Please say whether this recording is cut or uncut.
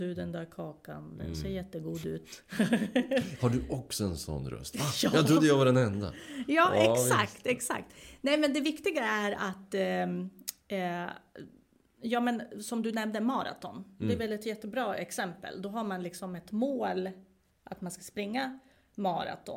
uncut